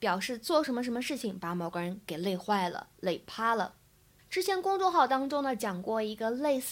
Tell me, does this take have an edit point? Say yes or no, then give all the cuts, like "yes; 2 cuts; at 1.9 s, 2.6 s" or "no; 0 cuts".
yes; 1 cut; at 4.2 s